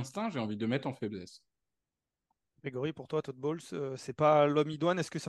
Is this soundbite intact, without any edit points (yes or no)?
yes